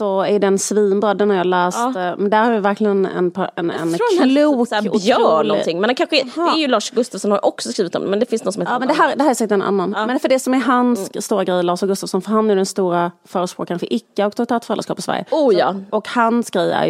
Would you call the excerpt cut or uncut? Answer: uncut